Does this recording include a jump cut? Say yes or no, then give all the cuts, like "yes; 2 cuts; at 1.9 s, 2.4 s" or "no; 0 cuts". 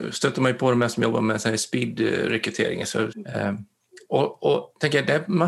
yes; 1 cut; at 3.1 s